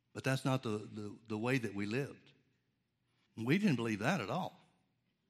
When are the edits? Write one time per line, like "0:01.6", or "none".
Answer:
0:03.3